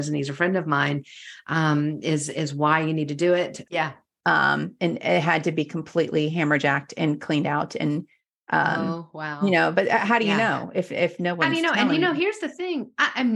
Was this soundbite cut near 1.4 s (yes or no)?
no